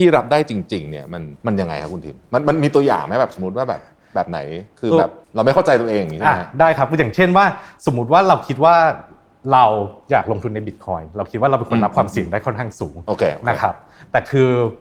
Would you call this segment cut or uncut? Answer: cut